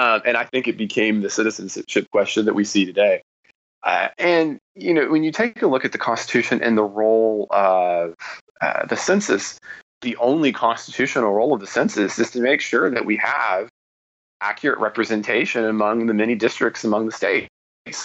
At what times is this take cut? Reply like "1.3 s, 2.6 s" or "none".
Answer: 10.0 s

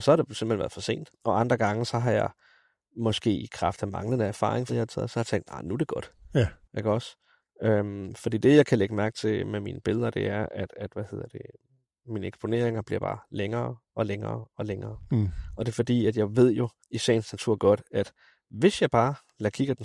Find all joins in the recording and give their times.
4.7 s

